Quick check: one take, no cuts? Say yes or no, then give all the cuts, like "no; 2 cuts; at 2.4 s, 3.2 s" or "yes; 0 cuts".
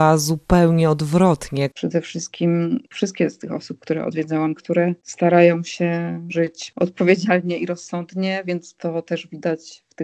no; 2 cuts; at 1.7 s, 4.6 s